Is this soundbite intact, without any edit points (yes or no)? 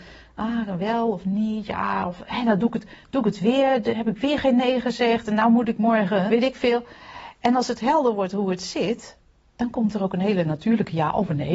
no